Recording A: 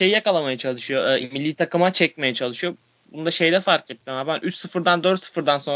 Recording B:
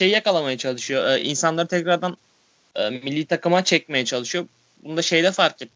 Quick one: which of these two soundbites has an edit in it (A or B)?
A